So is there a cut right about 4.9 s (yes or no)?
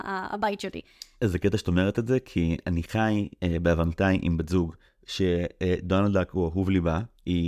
no